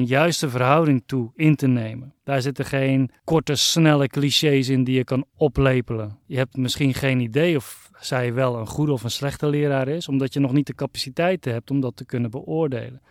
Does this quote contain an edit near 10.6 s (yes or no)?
no